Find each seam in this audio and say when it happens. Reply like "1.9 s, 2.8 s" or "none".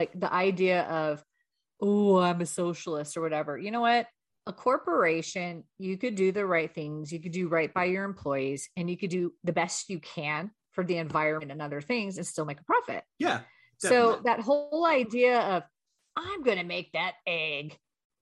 none

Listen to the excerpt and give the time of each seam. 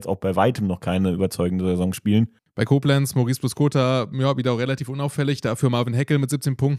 2.4 s

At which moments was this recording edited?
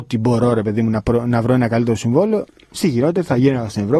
none

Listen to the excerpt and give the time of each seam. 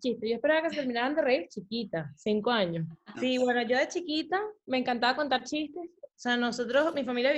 3.1 s

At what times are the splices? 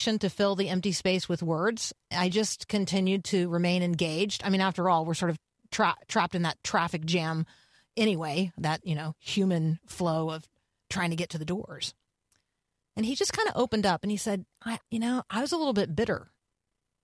14.8 s

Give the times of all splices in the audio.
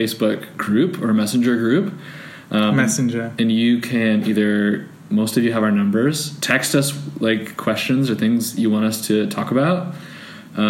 none

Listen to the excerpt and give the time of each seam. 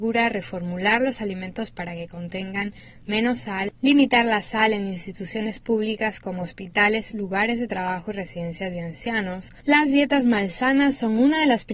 7.1 s, 9.6 s

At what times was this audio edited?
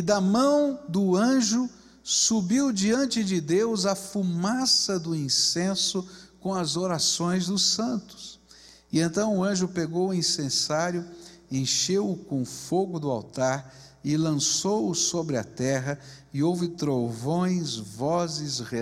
none

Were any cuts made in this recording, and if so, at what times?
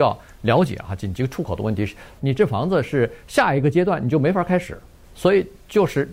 2.2 s

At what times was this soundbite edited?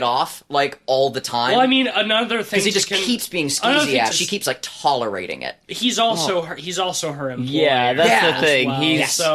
4.1 s

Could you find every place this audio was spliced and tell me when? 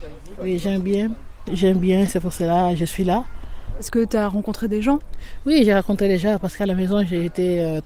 1.5 s

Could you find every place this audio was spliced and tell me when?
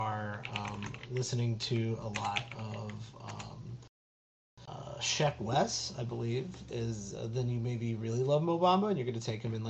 none

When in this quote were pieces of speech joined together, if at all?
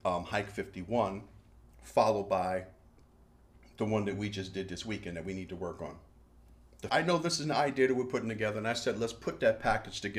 6.9 s

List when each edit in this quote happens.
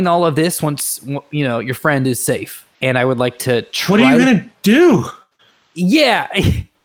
2.7 s

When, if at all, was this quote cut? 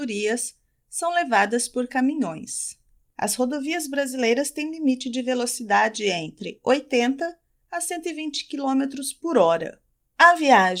3.1 s

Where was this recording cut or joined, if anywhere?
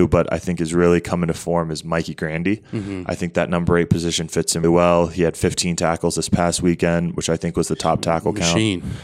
4.6 s

